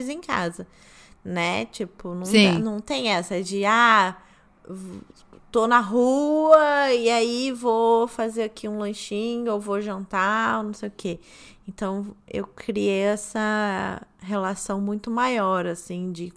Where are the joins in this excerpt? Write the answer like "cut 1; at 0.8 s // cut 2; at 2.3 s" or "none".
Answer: none